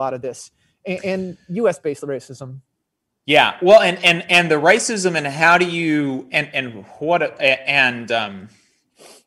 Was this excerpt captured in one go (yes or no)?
yes